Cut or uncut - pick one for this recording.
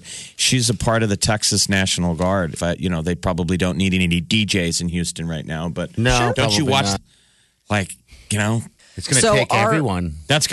cut